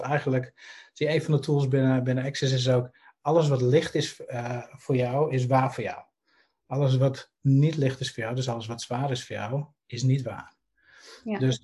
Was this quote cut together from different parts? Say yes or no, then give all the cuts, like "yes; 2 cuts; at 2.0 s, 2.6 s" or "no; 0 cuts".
no; 0 cuts